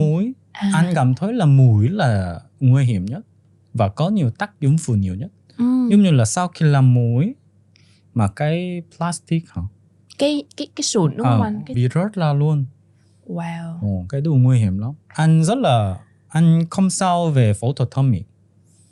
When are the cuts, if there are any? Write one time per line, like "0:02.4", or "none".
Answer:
0:11.7
0:15.0